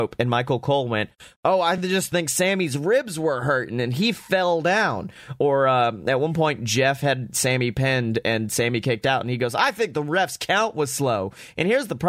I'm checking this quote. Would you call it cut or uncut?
uncut